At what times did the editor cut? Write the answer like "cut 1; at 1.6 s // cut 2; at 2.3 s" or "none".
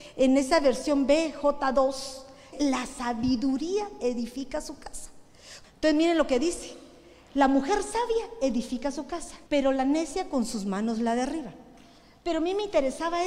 cut 1; at 2.5 s // cut 2; at 5.6 s // cut 3; at 9.5 s

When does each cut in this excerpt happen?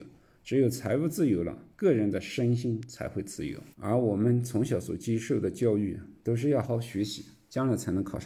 cut 1; at 1.7 s // cut 2; at 3.7 s // cut 3; at 6.6 s

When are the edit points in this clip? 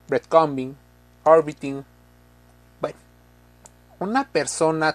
none

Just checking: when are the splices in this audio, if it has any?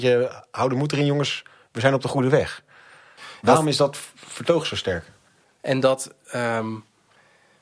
cut 1; at 5.4 s

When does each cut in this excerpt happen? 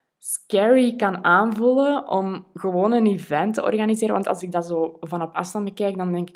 none

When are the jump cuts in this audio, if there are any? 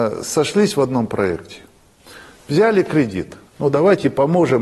cut 1; at 3.5 s

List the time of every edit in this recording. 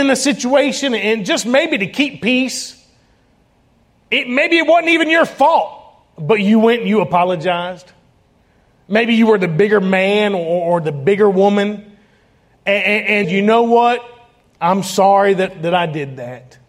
cut 1; at 13.2 s

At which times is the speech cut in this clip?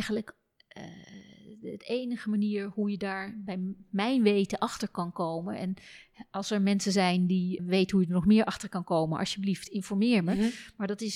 cut 1; at 7.6 s

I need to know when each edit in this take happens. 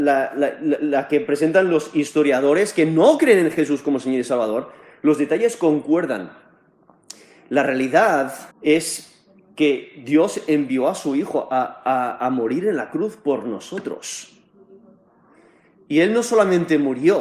cut 1; at 8.5 s

